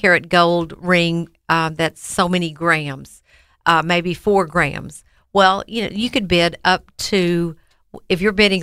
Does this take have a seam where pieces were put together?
no; 0 cuts

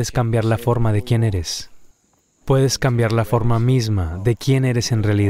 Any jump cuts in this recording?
yes; 1 cut; at 2.4 s

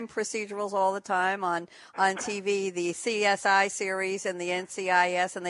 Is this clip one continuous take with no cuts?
yes; 0 cuts

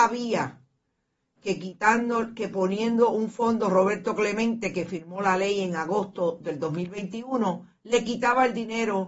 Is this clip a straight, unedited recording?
yes; 0 cuts

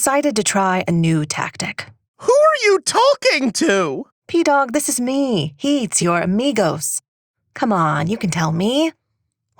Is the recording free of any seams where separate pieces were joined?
no; 1 cut; at 6.0 s

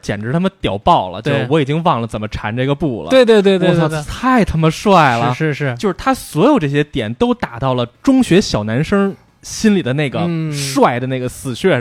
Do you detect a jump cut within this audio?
no; 0 cuts

